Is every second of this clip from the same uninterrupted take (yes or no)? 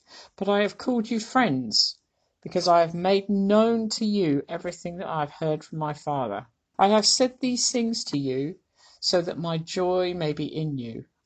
no